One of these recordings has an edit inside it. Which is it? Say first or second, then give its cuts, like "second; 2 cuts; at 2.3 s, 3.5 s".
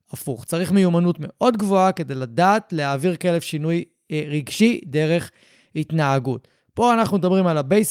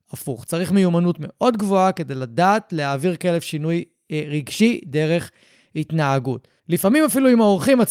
second; 1 cut; at 6.6 s